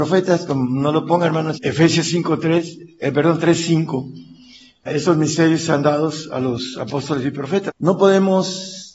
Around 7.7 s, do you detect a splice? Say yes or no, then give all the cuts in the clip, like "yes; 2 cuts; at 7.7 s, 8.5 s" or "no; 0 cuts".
yes; 3 cuts; at 1.5 s, 4.9 s, 7.7 s